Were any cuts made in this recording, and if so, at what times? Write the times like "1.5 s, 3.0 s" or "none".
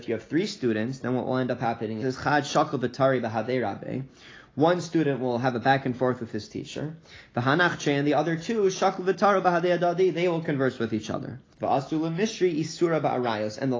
2.0 s, 11.5 s